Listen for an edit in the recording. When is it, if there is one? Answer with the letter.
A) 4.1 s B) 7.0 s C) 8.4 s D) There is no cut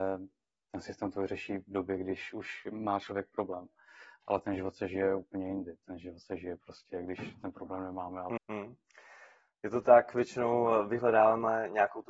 C